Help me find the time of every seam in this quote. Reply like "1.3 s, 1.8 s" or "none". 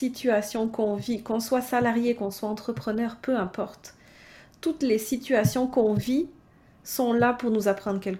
none